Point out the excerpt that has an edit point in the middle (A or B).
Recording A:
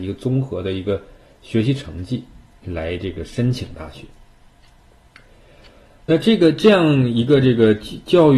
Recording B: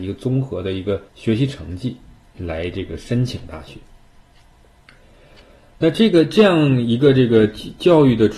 B